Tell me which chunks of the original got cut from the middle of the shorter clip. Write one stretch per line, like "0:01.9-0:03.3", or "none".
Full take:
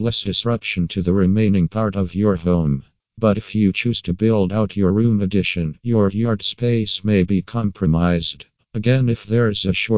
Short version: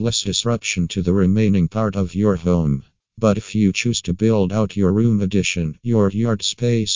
none